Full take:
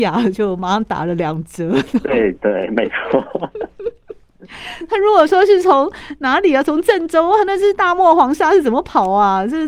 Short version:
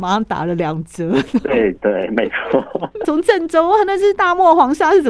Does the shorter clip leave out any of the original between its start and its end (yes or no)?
yes